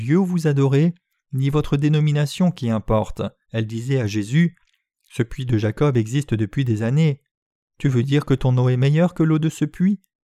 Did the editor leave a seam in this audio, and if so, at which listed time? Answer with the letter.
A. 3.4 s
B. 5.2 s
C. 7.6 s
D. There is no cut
A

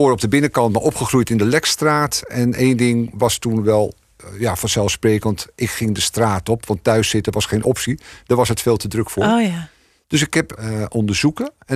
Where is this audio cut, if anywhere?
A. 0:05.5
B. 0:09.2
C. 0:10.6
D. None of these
C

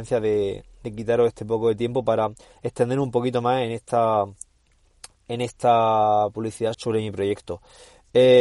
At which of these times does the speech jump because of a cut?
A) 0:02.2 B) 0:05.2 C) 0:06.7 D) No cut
C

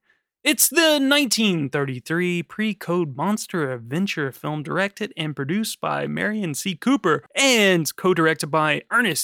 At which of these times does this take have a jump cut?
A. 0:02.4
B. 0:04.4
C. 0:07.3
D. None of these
C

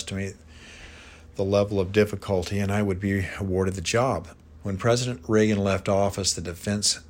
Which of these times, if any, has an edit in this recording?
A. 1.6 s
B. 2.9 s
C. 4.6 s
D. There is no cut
C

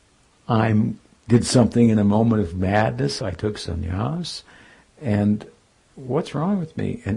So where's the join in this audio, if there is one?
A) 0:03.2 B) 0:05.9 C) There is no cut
A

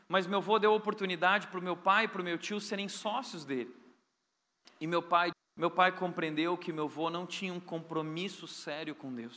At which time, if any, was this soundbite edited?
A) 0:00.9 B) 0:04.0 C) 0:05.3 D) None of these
C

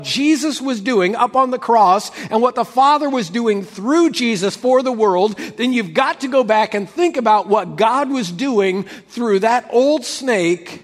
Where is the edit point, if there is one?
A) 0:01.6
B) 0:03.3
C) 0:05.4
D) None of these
D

